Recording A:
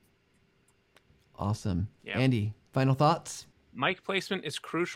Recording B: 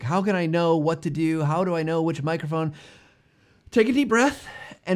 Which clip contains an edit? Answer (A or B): A